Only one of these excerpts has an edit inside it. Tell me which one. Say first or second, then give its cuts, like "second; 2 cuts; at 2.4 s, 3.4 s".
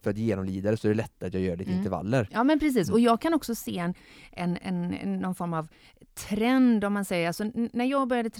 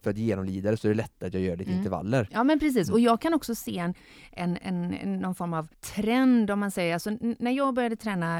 second; 1 cut; at 5.7 s